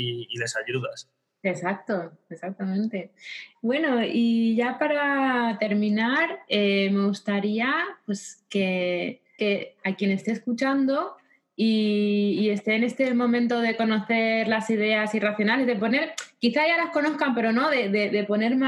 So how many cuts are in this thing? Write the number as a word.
one